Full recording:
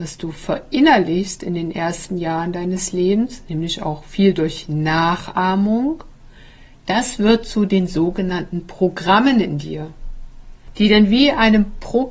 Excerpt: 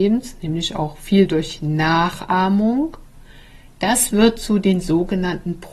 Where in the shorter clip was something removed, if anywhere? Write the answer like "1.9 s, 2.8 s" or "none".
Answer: none